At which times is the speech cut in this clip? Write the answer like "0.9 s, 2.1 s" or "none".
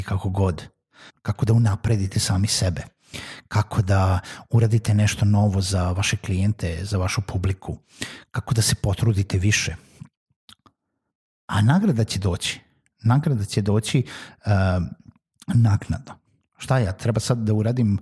1.1 s